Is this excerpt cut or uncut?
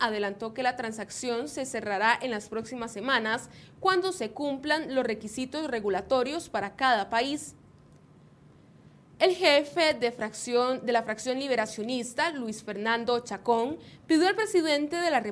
uncut